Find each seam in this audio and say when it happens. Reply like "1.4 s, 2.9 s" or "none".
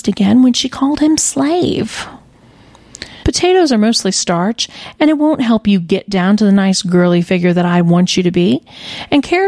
3.2 s